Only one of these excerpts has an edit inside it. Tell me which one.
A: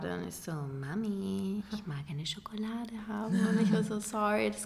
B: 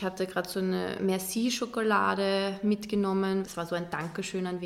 B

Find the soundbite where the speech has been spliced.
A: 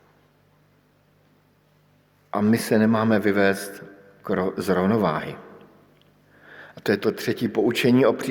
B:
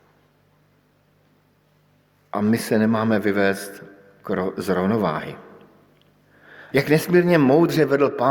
B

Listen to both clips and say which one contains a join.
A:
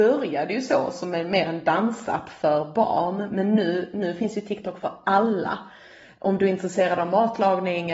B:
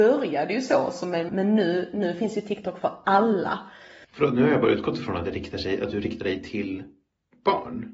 B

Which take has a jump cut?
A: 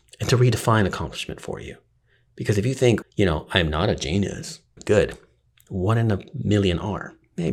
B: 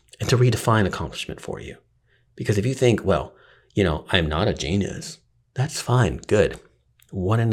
A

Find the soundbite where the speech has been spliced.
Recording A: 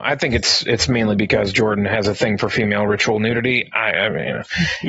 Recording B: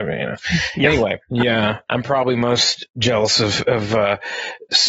B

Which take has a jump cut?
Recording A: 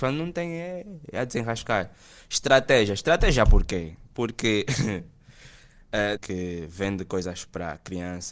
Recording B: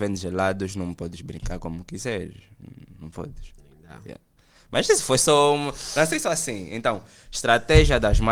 A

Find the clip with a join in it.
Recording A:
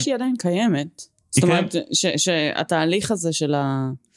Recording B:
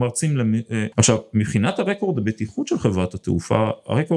B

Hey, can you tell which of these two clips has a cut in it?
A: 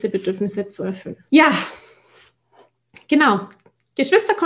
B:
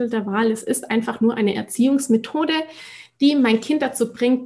A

